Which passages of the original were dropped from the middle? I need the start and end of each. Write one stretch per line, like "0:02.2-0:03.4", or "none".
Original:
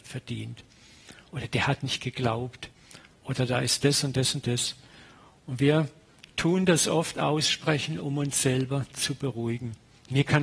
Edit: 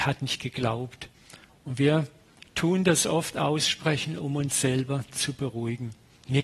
0:03.1-0:05.3